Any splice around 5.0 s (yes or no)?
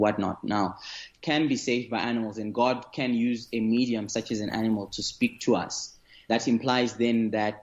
no